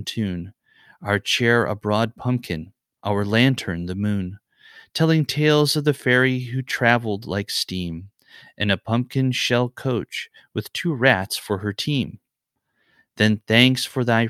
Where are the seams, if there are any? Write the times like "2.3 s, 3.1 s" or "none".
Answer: none